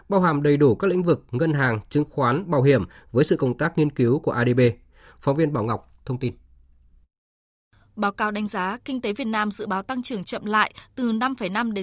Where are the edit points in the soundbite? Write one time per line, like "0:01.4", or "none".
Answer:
none